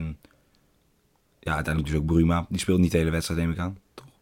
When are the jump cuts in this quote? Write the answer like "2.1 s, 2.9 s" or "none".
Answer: none